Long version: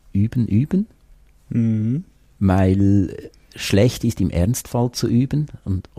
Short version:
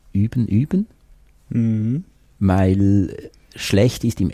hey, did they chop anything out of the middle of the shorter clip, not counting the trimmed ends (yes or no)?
no